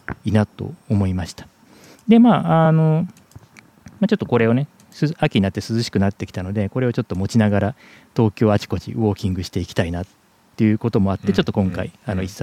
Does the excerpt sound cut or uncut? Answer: uncut